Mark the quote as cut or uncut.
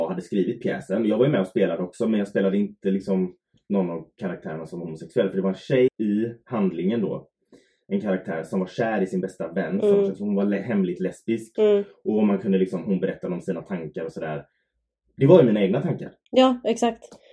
cut